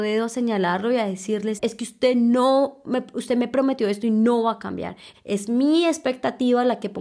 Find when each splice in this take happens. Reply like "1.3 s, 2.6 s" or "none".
1.6 s, 5.1 s